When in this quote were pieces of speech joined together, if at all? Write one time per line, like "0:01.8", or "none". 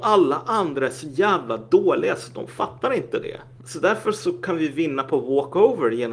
0:03.6